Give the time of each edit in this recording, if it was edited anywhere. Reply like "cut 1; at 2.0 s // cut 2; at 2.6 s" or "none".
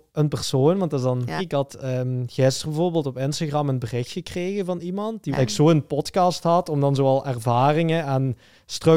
cut 1; at 1.4 s // cut 2; at 5.3 s